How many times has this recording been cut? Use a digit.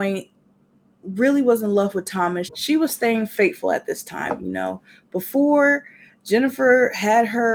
1